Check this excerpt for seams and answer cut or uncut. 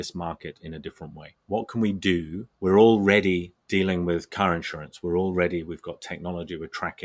uncut